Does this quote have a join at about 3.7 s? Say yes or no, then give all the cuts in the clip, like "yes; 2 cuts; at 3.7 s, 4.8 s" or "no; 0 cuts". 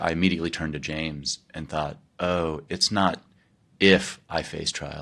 no; 1 cut; at 2.1 s